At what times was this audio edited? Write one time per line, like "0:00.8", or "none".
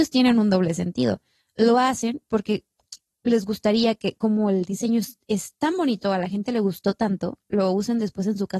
none